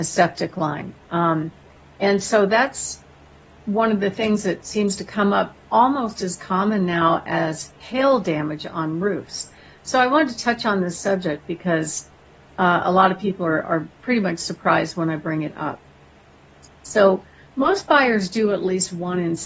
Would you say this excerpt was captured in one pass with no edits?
yes; 0 cuts

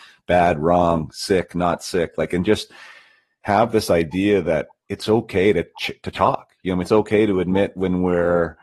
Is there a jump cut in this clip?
no; 0 cuts

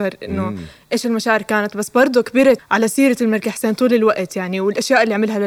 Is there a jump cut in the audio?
yes; 1 cut; at 2.6 s

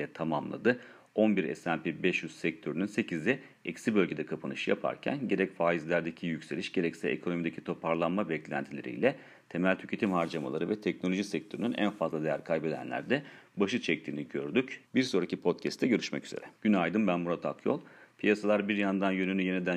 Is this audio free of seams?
no; 2 cuts; at 14.8 s, 16.5 s

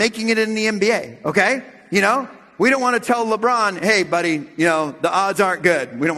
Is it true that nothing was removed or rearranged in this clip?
yes; 0 cuts

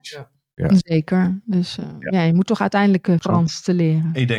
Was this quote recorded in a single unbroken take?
no; 1 cut; at 3.2 s

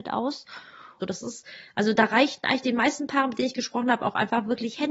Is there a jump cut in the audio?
yes; 1 cut; at 1.0 s

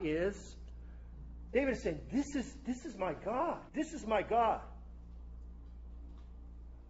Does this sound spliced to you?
yes; 1 cut; at 3.7 s

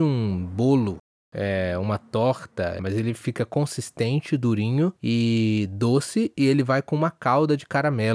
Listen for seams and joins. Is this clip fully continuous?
no; 2 cuts; at 2.8 s, 5.0 s

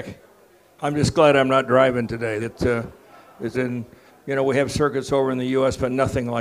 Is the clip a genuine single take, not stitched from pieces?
no; 2 cuts; at 2.4 s, 3.5 s

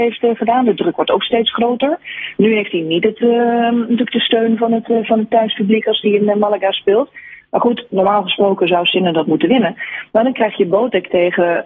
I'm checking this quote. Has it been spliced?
no; 0 cuts

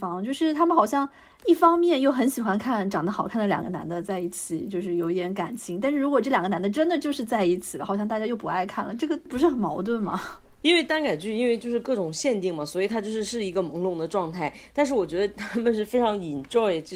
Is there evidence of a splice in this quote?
no; 0 cuts

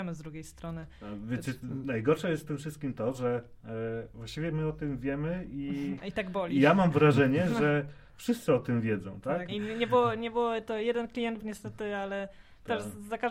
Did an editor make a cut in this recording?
yes; 2 cuts; at 9.5 s, 11.4 s

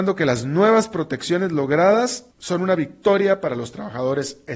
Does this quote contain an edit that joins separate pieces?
yes; 1 cut; at 2.3 s

